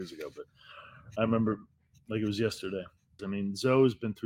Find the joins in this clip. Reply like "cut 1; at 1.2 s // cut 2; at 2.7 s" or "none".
cut 1; at 3.2 s